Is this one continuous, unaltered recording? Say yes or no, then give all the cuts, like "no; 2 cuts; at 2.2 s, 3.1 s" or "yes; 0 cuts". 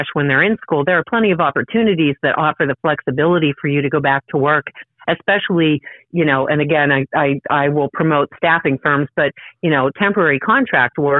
yes; 0 cuts